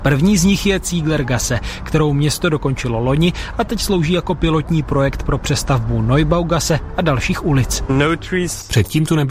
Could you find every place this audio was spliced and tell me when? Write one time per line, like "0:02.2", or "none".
none